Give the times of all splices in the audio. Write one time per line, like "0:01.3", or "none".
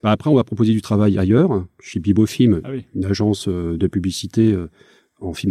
none